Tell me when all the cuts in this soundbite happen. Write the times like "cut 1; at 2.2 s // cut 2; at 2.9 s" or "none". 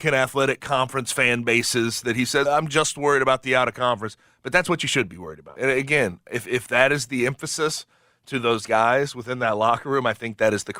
cut 1; at 2.5 s // cut 2; at 5.6 s